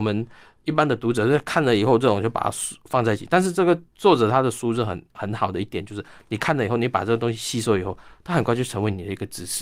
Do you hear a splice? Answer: no; 0 cuts

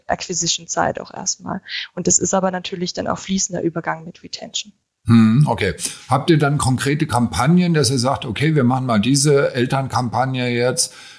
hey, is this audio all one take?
yes; 0 cuts

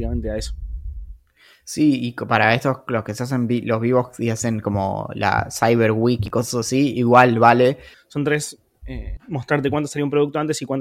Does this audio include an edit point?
yes; 2 cuts; at 7.9 s, 9.2 s

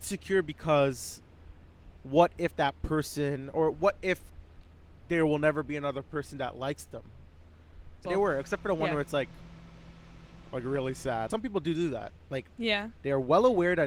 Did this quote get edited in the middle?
yes; 2 cuts; at 8.0 s, 11.3 s

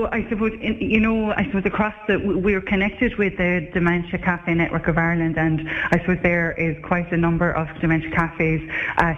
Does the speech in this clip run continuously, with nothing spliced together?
no; 1 cut; at 1.3 s

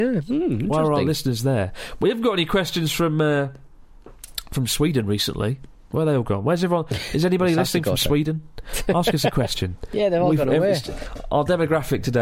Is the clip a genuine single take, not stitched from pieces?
yes; 0 cuts

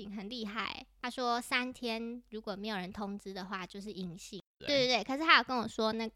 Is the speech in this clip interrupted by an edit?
yes; 2 cuts; at 1.0 s, 4.6 s

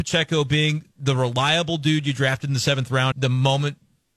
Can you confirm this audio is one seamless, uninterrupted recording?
no; 1 cut; at 3.1 s

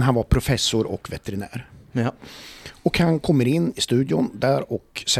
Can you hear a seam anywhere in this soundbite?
no; 0 cuts

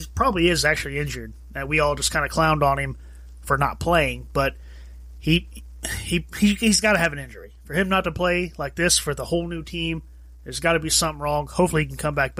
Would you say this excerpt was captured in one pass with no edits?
yes; 0 cuts

